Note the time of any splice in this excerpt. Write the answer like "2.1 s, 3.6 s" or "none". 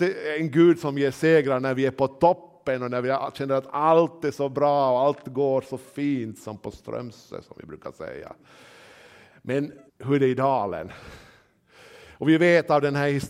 9.9 s